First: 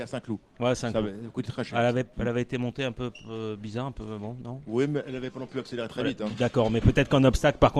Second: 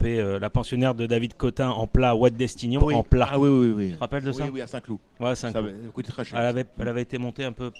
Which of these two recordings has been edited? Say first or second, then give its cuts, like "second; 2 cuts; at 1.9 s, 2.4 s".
second; 1 cut; at 2.8 s